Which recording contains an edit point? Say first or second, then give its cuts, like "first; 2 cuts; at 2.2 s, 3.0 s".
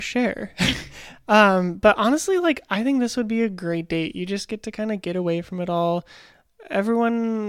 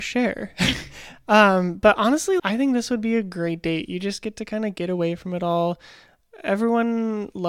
second; 1 cut; at 2.4 s